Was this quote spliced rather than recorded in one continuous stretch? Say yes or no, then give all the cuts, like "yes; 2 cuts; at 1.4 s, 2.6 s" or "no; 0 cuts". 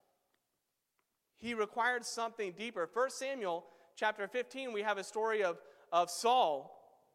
no; 0 cuts